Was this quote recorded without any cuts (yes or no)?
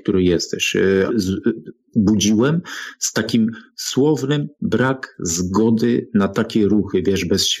no